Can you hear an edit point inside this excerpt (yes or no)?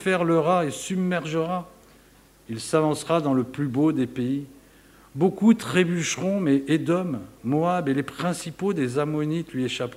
no